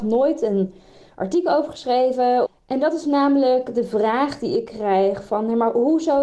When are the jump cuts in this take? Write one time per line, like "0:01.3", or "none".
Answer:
0:02.5

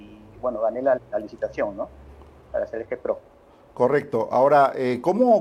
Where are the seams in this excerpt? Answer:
0:01.0

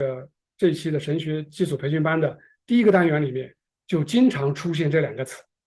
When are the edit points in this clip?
none

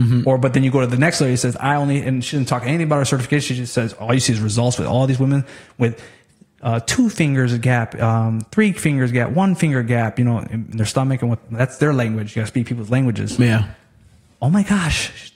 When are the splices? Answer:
none

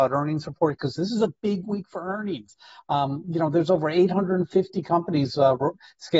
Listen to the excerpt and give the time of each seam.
none

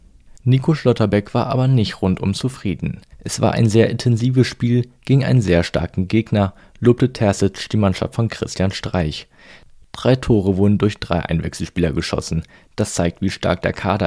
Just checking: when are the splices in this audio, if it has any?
0:03.1

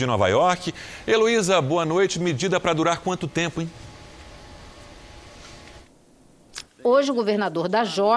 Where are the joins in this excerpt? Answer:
0:06.6

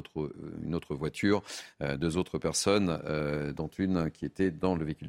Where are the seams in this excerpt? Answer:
none

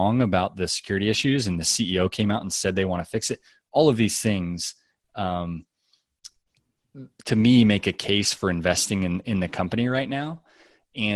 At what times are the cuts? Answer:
none

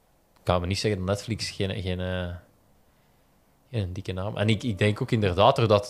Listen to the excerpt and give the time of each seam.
none

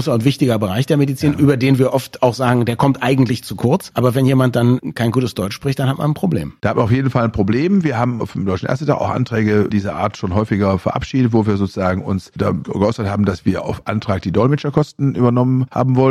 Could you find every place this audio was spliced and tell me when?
none

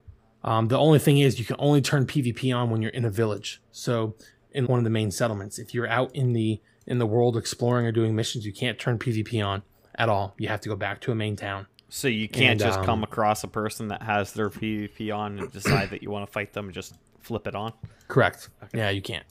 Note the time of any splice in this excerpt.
0:04.7

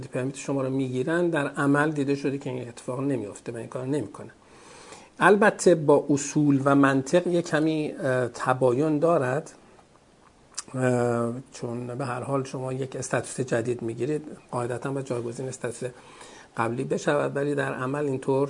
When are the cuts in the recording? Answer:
none

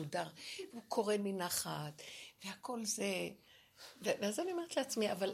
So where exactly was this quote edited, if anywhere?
none

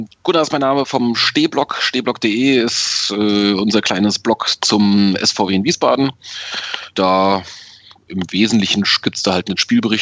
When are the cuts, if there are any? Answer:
none

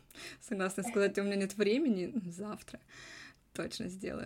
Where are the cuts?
none

